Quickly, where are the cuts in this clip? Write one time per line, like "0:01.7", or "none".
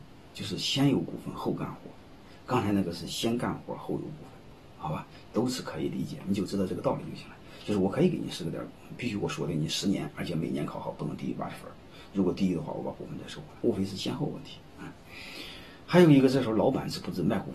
0:13.6